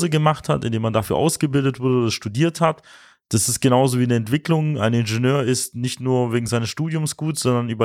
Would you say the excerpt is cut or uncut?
uncut